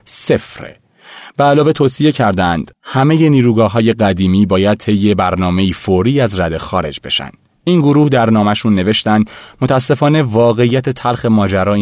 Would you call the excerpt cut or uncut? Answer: uncut